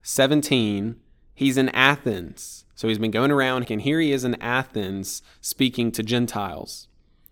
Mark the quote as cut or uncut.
cut